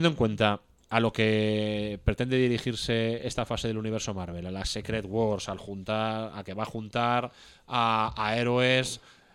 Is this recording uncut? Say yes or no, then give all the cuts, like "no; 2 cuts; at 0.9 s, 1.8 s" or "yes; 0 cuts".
yes; 0 cuts